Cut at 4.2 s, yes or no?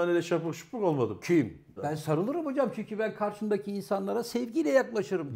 no